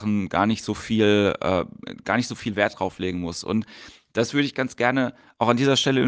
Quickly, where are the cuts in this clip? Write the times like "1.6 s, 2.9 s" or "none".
none